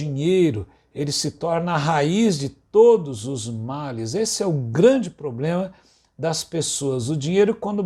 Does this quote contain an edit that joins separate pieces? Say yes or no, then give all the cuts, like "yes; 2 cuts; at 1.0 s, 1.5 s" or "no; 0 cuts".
no; 0 cuts